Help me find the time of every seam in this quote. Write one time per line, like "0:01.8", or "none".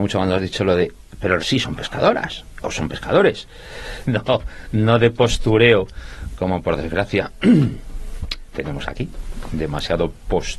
0:01.4
0:04.0